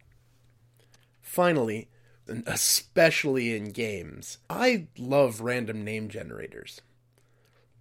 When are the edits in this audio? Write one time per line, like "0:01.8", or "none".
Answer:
0:02.3
0:04.4